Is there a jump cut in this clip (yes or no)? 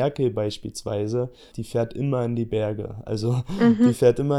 yes